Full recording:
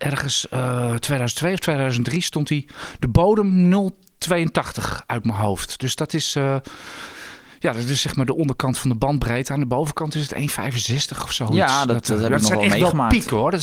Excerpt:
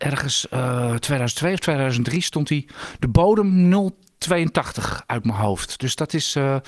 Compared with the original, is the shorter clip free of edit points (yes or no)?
yes